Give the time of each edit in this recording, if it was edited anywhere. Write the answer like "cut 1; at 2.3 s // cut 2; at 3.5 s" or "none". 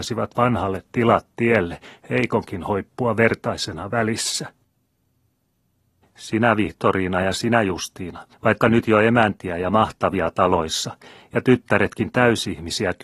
cut 1; at 6.0 s // cut 2; at 8.3 s